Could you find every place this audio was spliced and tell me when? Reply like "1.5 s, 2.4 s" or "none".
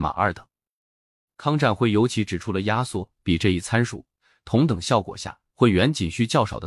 none